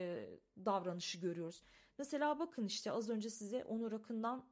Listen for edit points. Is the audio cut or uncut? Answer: uncut